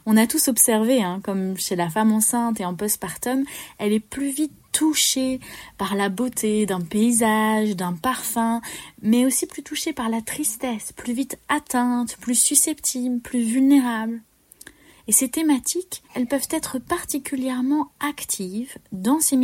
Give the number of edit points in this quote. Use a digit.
2